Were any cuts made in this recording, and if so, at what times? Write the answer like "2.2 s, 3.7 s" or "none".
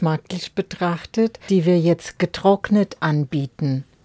1.5 s